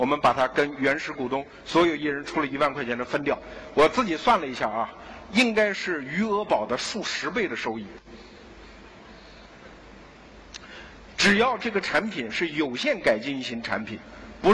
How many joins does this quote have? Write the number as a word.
one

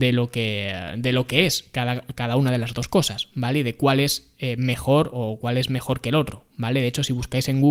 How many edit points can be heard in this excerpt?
zero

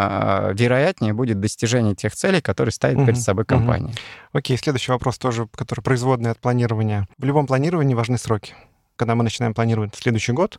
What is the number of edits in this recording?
one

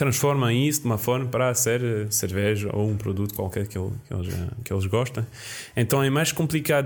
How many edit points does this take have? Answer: zero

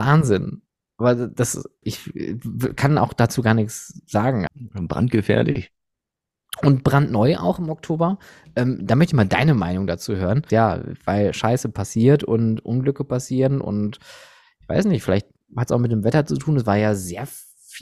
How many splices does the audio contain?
three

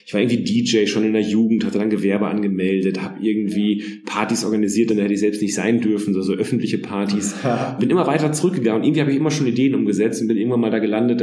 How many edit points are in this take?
two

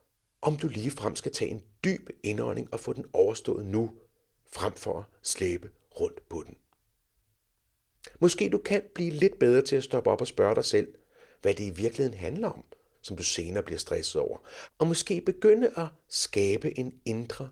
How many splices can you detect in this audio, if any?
two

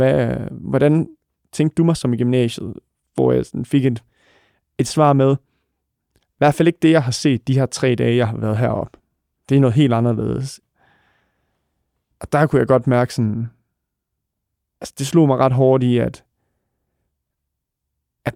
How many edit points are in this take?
zero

